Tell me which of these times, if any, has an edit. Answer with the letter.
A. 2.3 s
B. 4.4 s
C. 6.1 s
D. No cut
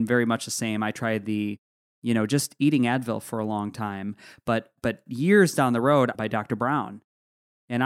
C